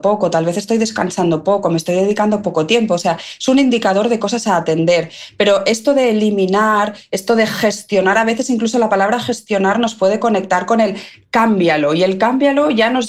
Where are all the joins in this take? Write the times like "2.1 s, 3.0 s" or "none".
none